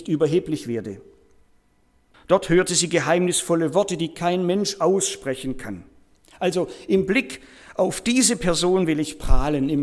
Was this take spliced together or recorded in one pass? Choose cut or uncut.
cut